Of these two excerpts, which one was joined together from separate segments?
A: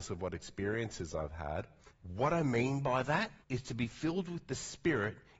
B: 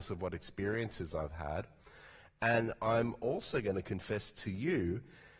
A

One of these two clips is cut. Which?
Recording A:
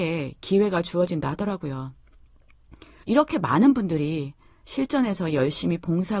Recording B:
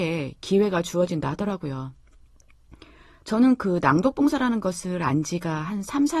A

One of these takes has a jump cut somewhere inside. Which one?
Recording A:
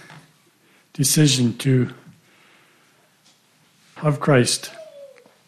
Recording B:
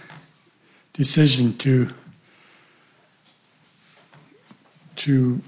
A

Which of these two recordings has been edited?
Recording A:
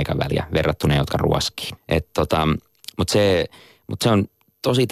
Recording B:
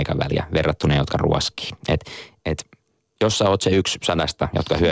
A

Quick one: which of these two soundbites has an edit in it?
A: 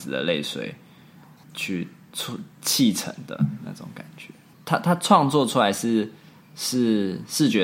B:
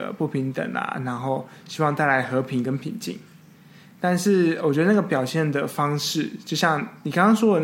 A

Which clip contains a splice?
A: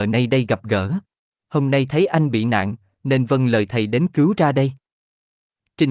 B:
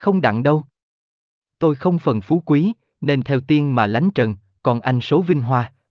A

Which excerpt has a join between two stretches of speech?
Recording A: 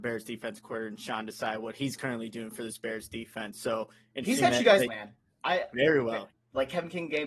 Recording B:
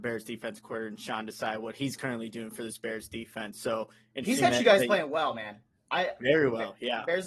A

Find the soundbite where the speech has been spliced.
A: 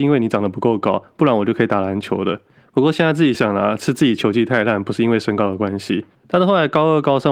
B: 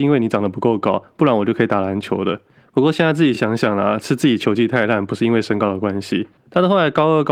A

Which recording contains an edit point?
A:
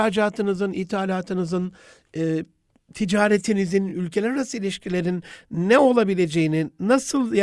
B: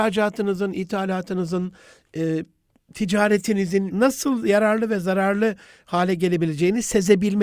B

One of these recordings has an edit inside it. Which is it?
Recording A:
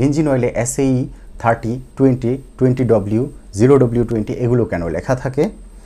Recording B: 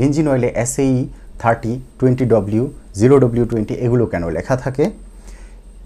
B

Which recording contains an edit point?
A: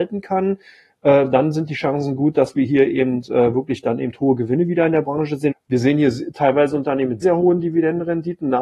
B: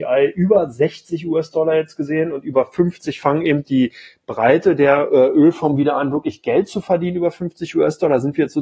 A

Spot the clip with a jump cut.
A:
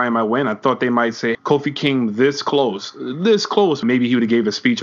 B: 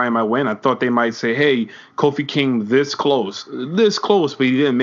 A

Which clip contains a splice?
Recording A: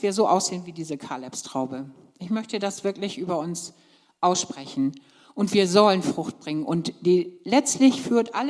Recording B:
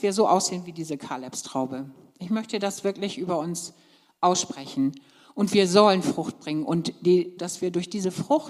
B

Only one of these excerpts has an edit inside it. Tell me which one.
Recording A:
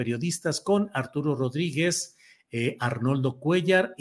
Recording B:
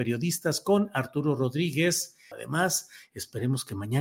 B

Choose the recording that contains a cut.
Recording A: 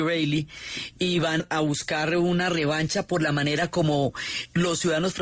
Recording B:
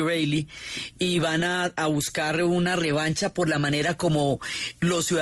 A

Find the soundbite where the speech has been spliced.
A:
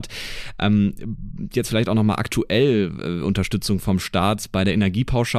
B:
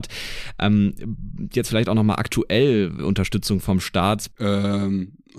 B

